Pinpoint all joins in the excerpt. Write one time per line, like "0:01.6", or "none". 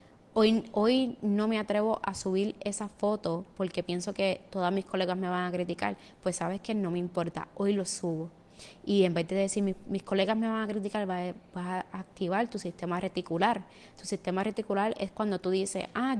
none